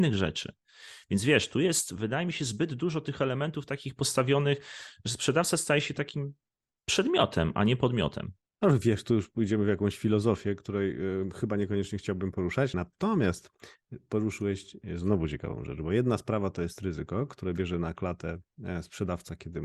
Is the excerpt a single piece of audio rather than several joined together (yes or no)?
yes